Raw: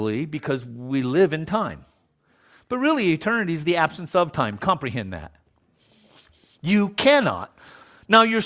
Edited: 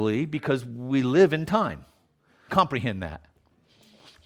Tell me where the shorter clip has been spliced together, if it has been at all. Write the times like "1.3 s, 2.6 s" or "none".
2.5 s